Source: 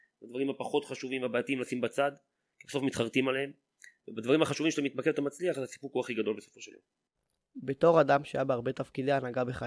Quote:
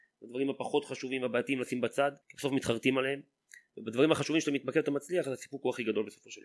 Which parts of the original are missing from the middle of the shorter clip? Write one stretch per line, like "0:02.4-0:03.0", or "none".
0:02.2-0:02.5